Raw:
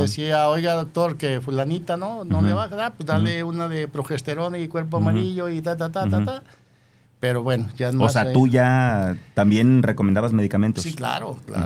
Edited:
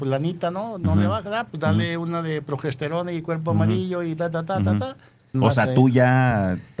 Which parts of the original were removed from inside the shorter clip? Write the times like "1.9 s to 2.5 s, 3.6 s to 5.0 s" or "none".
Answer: 6.8 s to 7.9 s